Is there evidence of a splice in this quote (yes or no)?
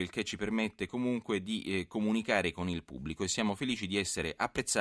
no